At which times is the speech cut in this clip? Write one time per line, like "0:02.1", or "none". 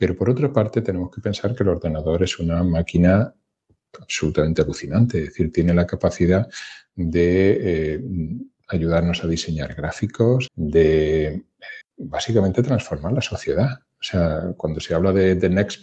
0:10.5
0:11.8